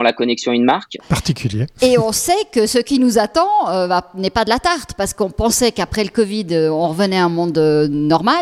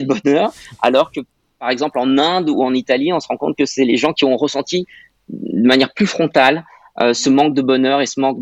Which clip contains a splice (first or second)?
first